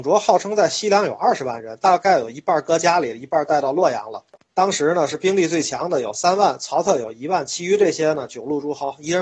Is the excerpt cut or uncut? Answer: cut